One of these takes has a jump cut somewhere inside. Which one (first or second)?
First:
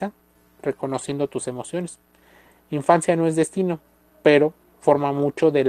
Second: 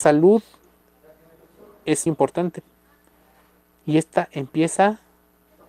second